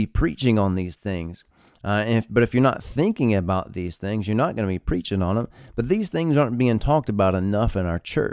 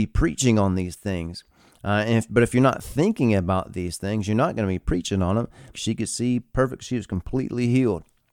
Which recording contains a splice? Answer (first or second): second